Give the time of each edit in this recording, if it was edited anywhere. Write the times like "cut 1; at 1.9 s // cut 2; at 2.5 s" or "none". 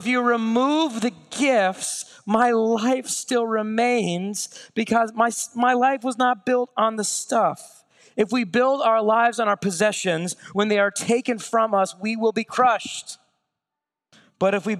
none